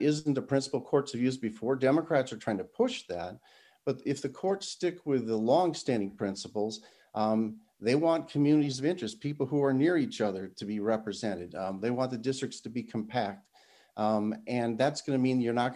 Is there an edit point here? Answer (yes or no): no